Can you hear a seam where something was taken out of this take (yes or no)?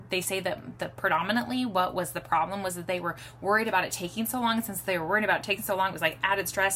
no